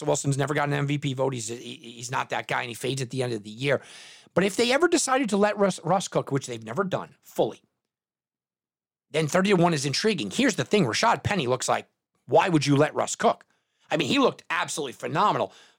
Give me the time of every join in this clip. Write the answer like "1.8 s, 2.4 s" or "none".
none